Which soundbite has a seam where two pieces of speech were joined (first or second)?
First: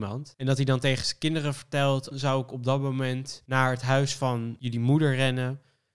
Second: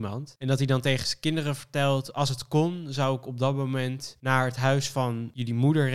first